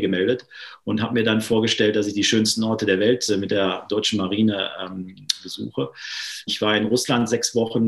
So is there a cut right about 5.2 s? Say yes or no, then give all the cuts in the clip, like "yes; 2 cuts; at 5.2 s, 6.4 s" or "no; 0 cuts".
no; 1 cut; at 6.5 s